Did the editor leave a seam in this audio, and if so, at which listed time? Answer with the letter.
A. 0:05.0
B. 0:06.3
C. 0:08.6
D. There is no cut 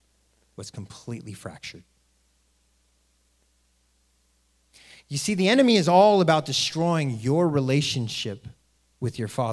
D